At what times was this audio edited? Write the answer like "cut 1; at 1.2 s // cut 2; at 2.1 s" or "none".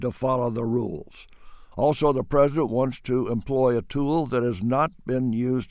cut 1; at 1.7 s

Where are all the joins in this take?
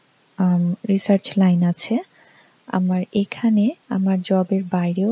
cut 1; at 3.8 s

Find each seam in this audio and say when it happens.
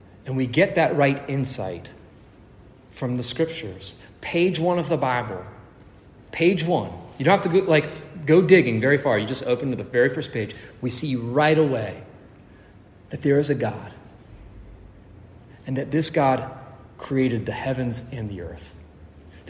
none

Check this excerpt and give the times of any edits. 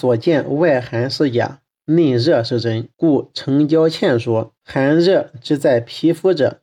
cut 1; at 2.9 s // cut 2; at 4.6 s

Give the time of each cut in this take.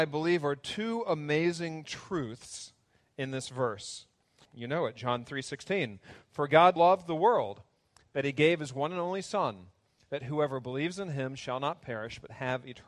cut 1; at 4.4 s // cut 2; at 6.8 s

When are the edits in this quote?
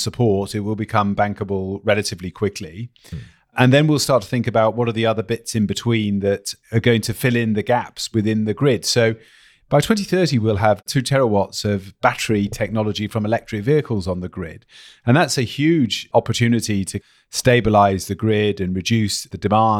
none

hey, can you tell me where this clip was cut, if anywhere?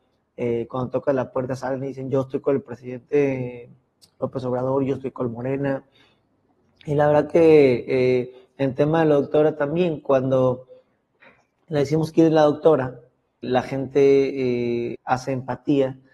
cut 1; at 13.4 s // cut 2; at 14.9 s

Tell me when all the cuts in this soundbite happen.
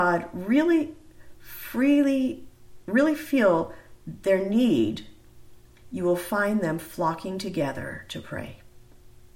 none

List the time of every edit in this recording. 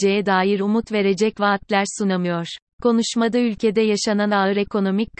cut 1; at 2.7 s

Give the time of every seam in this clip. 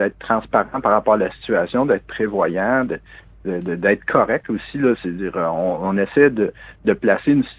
none

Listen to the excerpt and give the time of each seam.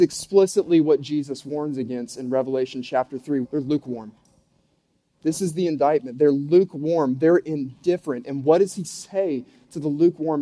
cut 1; at 3.4 s

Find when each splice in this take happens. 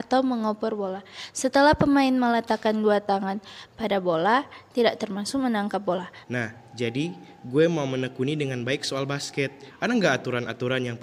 cut 1; at 6.2 s // cut 2; at 9.7 s

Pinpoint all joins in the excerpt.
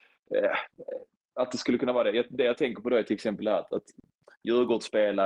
none

